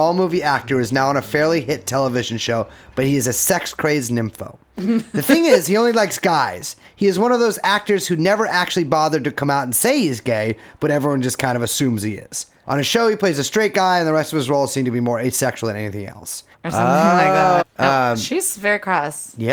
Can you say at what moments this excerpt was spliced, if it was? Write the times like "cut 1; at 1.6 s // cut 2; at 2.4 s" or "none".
cut 1; at 12.6 s // cut 2; at 16.5 s // cut 3; at 17.6 s